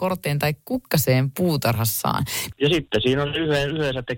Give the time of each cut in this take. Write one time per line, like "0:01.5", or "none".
0:02.5